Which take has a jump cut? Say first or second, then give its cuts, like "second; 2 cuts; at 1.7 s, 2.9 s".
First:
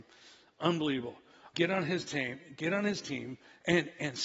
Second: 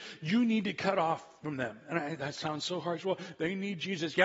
first; 1 cut; at 1.5 s